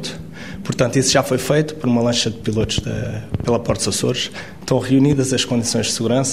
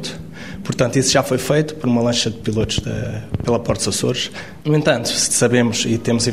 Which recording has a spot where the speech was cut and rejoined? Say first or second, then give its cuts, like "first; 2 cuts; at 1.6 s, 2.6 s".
second; 1 cut; at 4.6 s